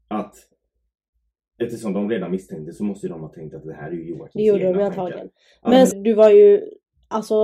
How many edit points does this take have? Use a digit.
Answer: 1